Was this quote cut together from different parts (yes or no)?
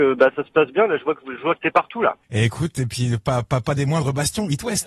no